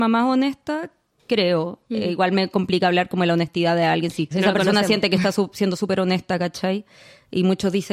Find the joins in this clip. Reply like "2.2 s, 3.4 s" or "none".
4.3 s